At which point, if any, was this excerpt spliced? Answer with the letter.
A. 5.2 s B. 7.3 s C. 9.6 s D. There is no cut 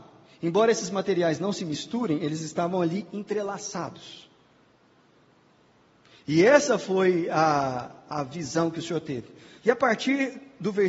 C